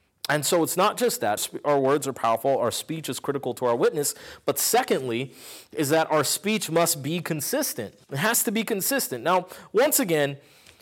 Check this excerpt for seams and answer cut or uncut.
cut